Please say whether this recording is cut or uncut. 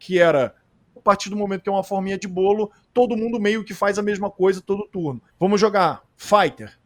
cut